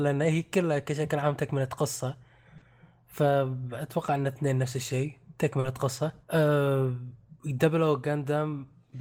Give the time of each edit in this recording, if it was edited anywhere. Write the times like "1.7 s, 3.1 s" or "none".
6.2 s